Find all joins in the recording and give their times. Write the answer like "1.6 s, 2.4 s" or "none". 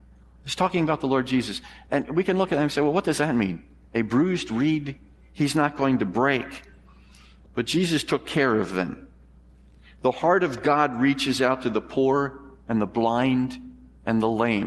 7.5 s